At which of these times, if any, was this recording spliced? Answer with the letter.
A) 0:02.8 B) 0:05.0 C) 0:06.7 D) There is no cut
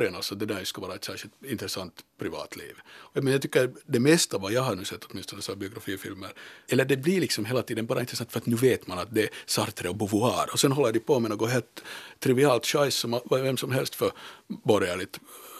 C